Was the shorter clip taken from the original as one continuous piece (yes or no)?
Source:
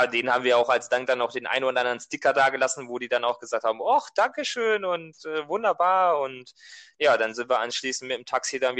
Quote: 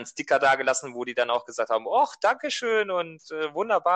yes